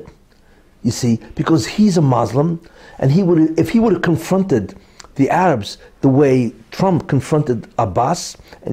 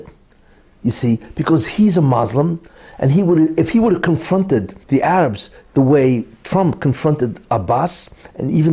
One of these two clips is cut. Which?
second; 1 cut; at 4.8 s

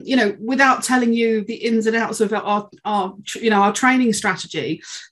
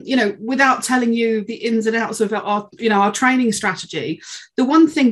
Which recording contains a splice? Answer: second; 1 cut; at 2.8 s

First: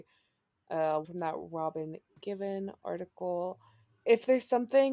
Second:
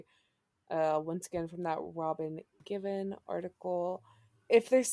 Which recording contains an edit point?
first; 1 cut; at 1.0 s

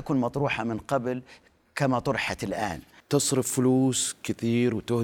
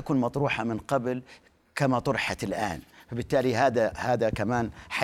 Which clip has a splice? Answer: first; 1 cut; at 3.0 s

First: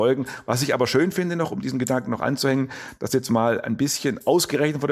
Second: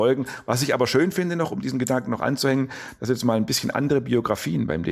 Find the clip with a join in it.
second; 1 cut; at 3.0 s

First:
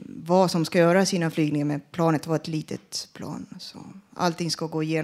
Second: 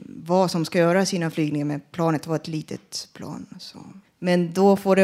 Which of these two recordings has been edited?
second; 1 cut; at 4.0 s

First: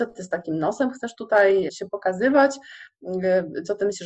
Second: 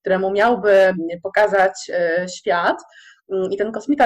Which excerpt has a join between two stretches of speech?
first; 1 cut; at 1.7 s

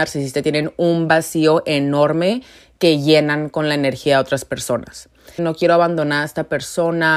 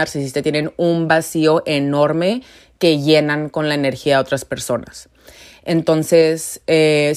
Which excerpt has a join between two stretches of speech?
first; 1 cut; at 5.4 s

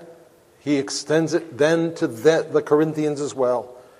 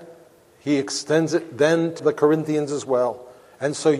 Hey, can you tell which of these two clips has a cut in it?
second; 1 cut; at 2.0 s

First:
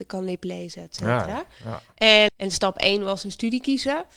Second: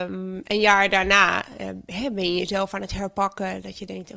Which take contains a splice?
first; 1 cut; at 2.3 s

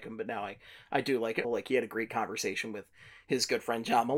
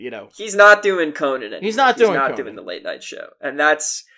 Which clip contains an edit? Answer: first; 1 cut; at 1.4 s

